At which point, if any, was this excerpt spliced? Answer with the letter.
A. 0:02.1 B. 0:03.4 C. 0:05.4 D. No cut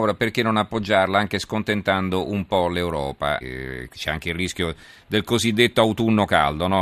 B